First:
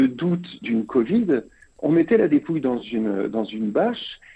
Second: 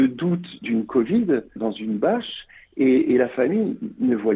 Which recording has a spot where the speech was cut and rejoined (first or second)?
second